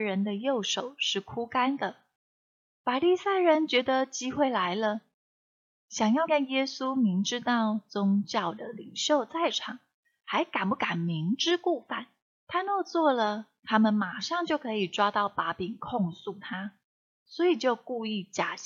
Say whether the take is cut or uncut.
cut